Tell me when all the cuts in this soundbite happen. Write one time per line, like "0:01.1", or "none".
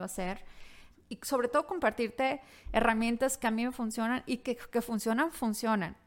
0:00.9